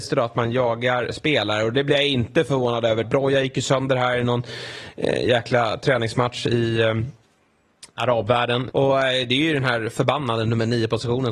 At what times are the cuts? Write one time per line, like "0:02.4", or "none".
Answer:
0:03.0
0:08.7